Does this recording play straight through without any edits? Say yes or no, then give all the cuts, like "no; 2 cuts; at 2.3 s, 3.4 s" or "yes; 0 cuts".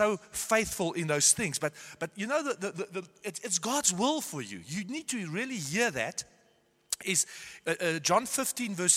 yes; 0 cuts